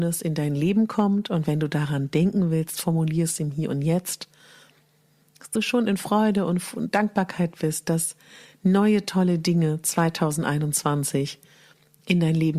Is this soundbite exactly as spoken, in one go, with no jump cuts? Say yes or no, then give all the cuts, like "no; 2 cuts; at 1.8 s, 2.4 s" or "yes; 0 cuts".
yes; 0 cuts